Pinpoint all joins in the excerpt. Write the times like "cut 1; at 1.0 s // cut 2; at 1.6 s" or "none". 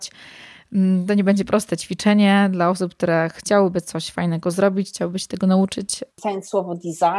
cut 1; at 6.1 s